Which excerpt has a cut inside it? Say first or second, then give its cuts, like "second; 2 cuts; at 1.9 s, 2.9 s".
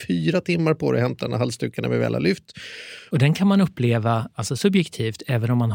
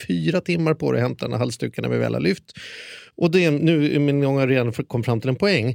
first; 1 cut; at 3.1 s